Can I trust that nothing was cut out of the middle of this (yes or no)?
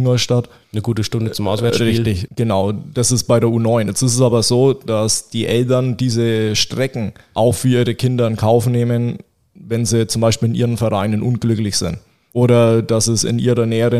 no